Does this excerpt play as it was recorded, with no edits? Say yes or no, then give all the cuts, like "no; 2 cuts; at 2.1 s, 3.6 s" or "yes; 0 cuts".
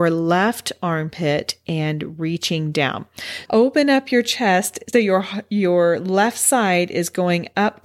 no; 2 cuts; at 3.5 s, 4.9 s